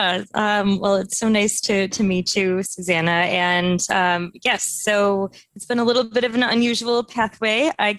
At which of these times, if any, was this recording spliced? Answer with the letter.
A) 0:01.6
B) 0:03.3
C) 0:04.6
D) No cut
D